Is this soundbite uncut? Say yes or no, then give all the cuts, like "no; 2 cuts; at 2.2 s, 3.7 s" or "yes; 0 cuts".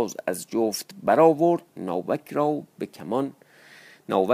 no; 1 cut; at 1.7 s